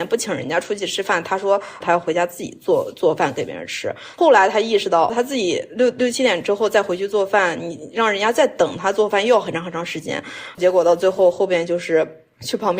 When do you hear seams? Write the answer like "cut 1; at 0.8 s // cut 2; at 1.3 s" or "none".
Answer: cut 1; at 4.1 s // cut 2; at 10.5 s